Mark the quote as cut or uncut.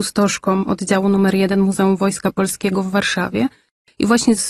uncut